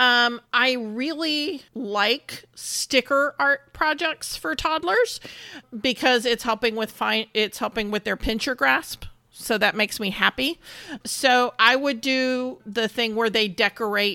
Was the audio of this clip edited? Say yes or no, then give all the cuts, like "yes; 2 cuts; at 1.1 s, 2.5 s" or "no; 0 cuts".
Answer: no; 0 cuts